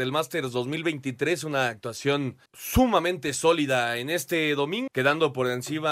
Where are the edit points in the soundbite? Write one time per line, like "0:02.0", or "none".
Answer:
0:02.5
0:04.9